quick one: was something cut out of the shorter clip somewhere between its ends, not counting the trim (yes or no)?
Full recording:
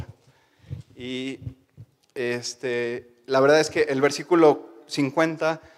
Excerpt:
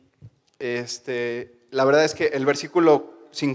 no